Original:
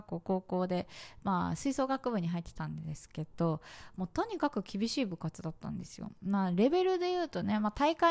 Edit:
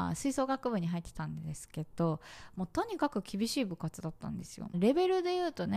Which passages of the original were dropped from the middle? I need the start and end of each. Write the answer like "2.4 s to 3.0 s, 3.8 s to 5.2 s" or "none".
6.1 s to 6.5 s